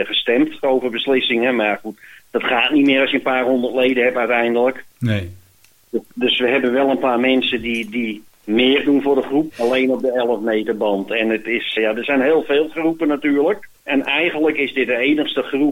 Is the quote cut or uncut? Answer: cut